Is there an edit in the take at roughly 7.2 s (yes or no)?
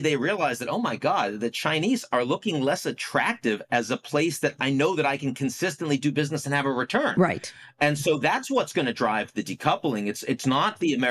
no